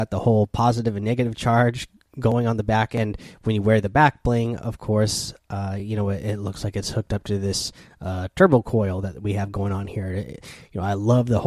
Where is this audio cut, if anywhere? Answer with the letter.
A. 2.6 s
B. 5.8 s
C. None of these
C